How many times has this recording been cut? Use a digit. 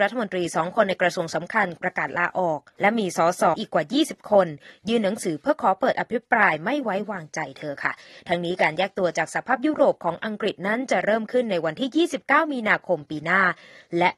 1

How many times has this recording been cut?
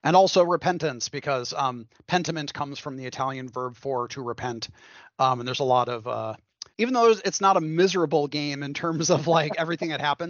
1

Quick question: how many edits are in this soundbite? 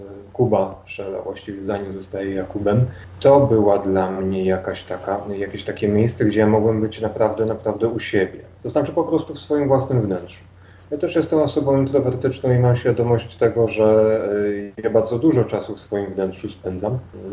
0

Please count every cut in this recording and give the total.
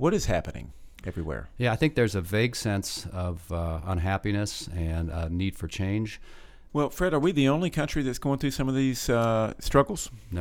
1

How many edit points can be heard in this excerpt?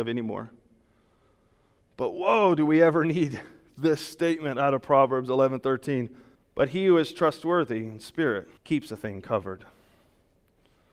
2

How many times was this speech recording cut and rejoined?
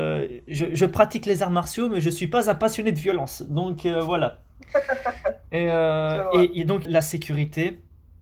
1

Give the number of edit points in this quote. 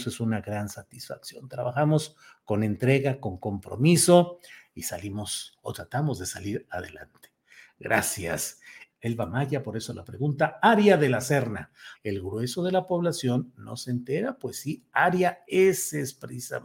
2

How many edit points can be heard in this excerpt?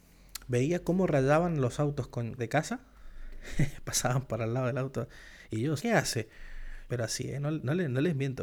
3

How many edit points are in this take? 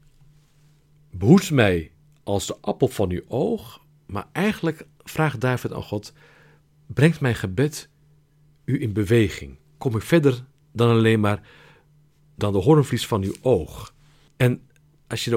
2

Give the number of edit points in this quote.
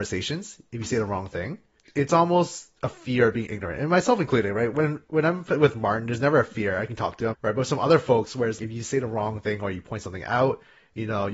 2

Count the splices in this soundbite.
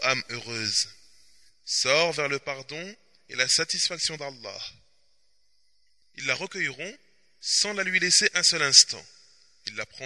1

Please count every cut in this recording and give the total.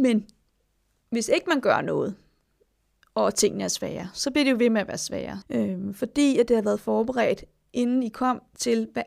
1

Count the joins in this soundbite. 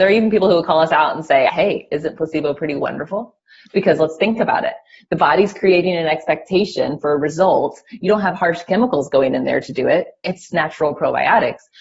2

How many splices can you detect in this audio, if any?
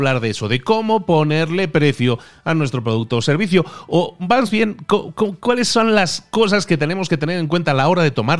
0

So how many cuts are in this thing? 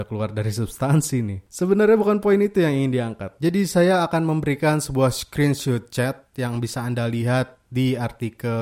0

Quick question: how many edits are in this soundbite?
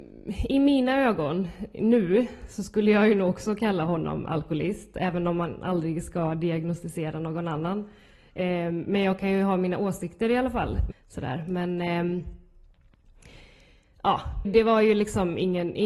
2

